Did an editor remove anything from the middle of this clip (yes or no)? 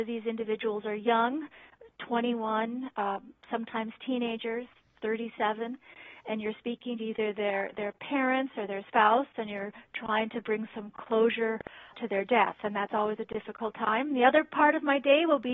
no